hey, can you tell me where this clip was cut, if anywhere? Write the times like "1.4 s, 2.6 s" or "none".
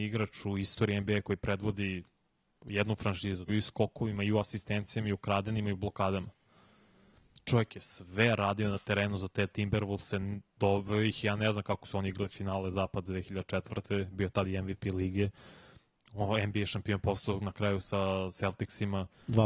3.5 s